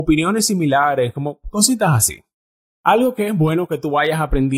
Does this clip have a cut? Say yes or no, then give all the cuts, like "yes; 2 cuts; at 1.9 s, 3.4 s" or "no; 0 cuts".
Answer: no; 0 cuts